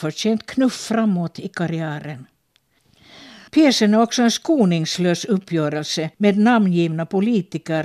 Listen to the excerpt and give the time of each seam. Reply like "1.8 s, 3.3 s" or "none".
3.5 s, 6.1 s